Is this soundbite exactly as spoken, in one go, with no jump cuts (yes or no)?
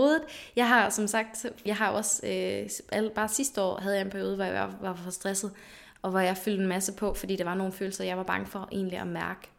no